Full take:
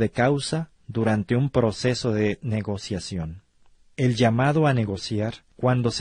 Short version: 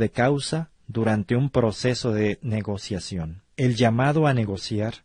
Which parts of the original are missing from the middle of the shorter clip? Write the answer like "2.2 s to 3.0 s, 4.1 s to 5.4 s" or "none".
3.5 s to 3.9 s